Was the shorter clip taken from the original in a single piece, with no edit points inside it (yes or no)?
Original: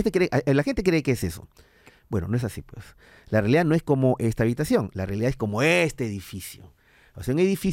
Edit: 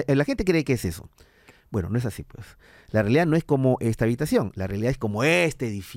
yes